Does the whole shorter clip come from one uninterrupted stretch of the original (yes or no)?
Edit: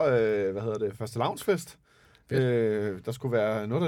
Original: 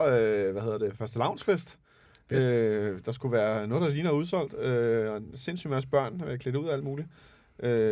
yes